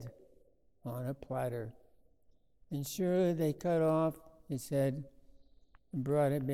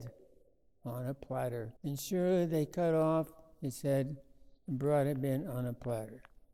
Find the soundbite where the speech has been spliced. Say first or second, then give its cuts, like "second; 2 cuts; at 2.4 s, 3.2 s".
second; 2 cuts; at 1.8 s, 4.6 s